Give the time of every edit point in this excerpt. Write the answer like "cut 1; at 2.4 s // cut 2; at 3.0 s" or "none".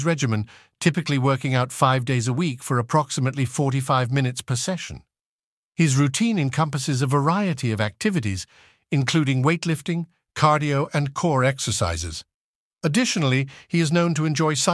none